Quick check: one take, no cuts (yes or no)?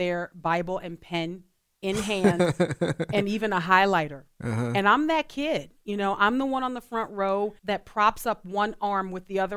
no